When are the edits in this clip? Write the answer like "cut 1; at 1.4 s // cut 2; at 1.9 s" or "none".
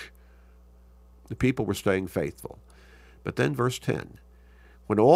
cut 1; at 1.1 s

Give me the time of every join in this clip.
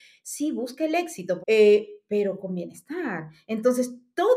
cut 1; at 1.4 s

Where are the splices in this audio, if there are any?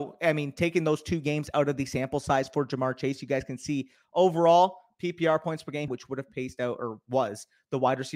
cut 1; at 5.9 s

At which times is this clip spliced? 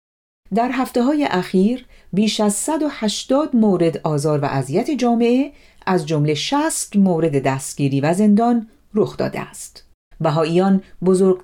cut 1; at 10.1 s

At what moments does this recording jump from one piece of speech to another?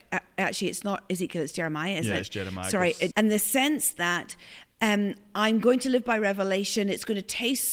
cut 1; at 3.1 s

